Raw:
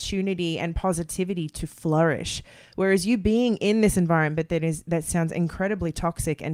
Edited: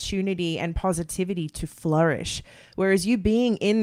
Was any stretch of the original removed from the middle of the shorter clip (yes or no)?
no